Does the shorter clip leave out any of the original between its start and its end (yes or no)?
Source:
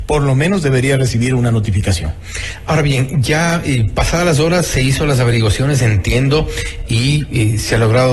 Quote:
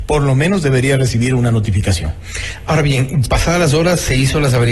yes